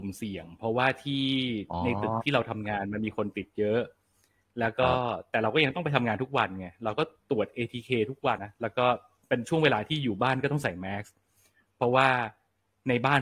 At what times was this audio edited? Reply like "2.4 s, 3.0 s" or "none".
8.4 s